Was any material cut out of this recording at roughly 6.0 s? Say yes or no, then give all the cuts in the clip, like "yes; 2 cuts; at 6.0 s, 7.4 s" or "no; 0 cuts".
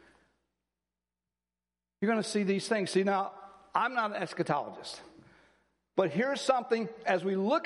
yes; 1 cut; at 6.0 s